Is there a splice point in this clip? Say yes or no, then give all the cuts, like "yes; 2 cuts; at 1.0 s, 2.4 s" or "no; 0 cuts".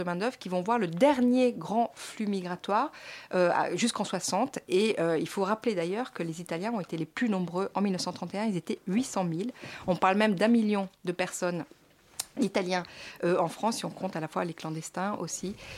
no; 0 cuts